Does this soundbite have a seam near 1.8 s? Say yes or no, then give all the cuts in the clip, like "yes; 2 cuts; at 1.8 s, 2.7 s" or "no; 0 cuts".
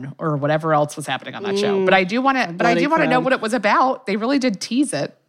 no; 0 cuts